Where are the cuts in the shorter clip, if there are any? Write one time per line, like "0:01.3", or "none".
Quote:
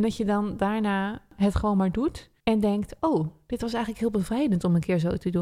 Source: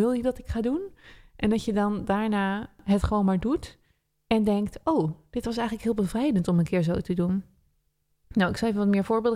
0:02.4

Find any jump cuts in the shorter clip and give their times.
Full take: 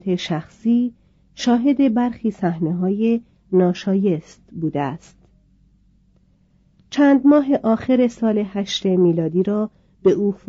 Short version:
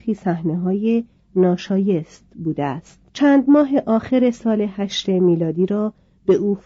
0:03.1

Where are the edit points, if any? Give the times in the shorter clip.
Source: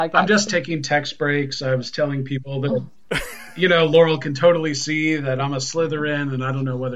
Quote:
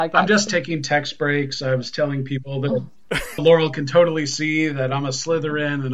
0:03.4

